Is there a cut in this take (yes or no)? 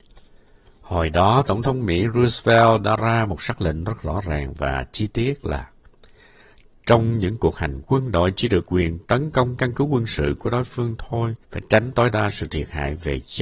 yes